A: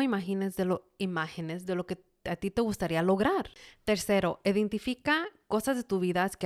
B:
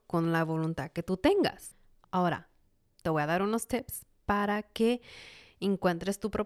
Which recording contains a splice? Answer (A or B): B